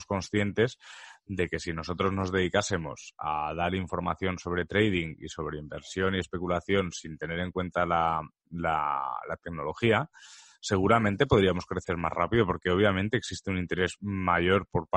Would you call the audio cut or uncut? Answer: uncut